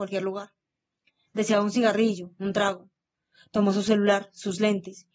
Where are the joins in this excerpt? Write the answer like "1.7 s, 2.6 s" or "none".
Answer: none